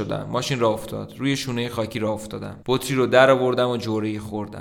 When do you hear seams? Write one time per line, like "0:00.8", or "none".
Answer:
0:02.6